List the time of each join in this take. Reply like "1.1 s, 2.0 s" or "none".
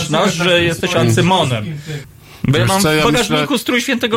2.0 s